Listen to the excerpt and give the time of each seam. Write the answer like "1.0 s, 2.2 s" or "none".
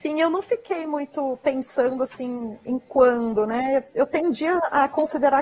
none